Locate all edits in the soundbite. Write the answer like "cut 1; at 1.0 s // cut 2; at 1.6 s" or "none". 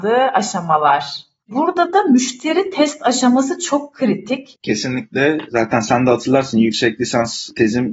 cut 1; at 1.5 s // cut 2; at 4.5 s